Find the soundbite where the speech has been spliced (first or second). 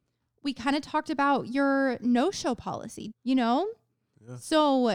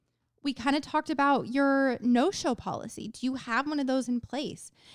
first